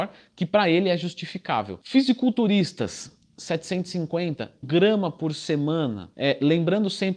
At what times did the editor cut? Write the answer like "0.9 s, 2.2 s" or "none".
1.8 s, 4.6 s